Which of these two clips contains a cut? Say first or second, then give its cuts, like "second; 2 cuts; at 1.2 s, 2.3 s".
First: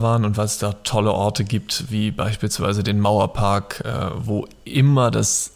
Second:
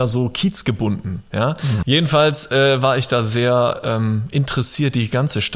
second; 1 cut; at 1.8 s